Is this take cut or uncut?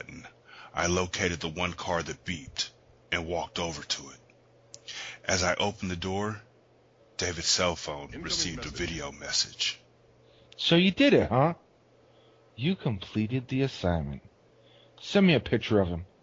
uncut